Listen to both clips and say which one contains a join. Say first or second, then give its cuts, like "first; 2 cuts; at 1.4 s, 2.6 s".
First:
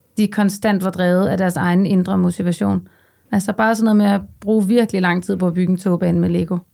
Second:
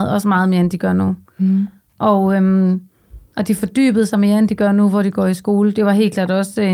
first; 1 cut; at 3.3 s